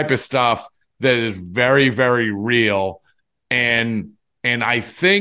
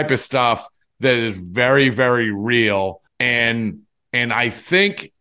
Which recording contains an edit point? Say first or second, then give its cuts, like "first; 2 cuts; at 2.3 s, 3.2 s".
second; 1 cut; at 3.1 s